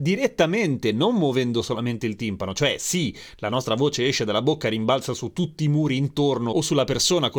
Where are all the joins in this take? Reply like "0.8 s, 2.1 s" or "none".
none